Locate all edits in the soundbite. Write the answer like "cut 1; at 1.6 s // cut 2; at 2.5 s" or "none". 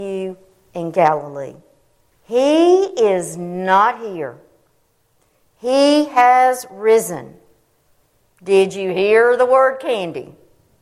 cut 1; at 2.1 s // cut 2; at 8.2 s

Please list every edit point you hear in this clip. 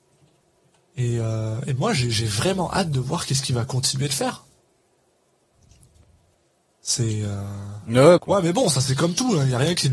cut 1; at 8.2 s

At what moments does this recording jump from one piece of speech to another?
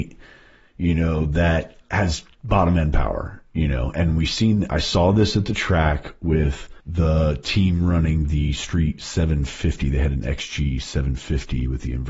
cut 1; at 3.9 s // cut 2; at 6.8 s

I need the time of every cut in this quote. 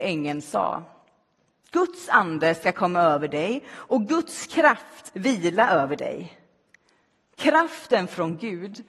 none

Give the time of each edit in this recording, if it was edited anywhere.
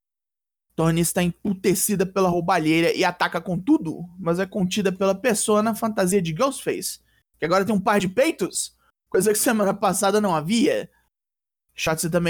none

